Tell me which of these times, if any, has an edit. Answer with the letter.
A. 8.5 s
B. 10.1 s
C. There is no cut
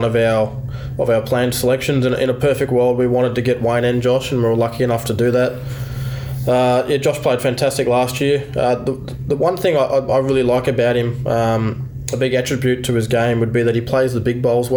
C